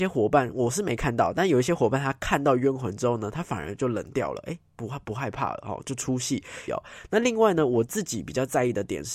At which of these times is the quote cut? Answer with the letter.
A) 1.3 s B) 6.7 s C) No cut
B